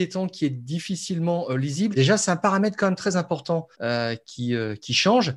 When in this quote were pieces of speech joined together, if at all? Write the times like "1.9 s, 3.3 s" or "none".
1.9 s, 3.7 s